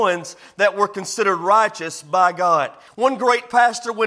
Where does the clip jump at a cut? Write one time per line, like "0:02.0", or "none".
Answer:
0:02.9